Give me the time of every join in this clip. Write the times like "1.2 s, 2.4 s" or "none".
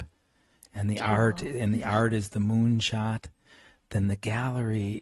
none